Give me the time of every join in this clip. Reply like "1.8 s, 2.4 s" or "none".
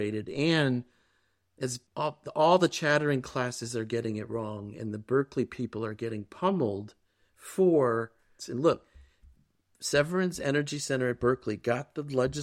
1.9 s, 8.4 s